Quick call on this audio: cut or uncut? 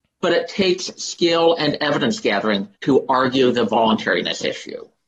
cut